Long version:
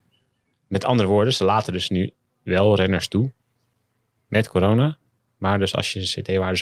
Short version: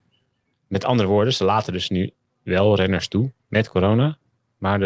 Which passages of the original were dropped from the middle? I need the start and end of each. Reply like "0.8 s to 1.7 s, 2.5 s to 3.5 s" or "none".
3.4 s to 4.2 s